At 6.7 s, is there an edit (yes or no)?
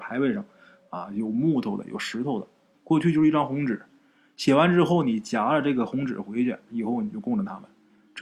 yes